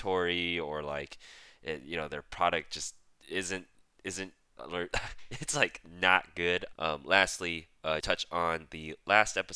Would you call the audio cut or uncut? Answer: cut